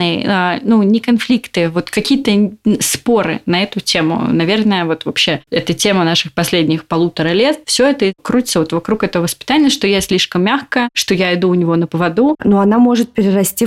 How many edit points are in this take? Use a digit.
2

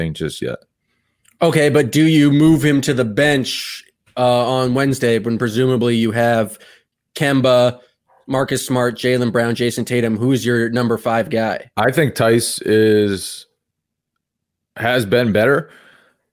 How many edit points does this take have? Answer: 0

